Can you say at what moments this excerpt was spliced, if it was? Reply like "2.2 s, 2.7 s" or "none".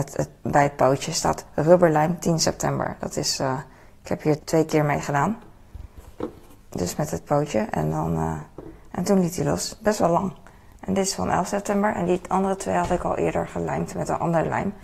4.4 s